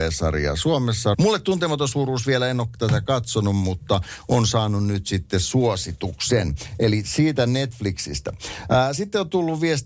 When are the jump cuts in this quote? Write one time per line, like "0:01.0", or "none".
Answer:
0:01.1